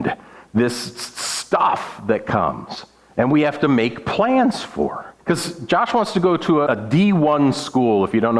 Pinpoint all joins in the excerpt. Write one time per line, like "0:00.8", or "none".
0:05.2
0:06.7